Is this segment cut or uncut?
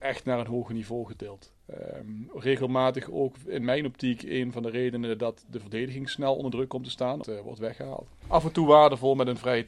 cut